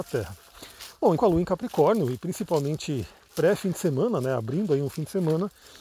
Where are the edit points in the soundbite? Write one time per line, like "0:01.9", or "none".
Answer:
0:01.2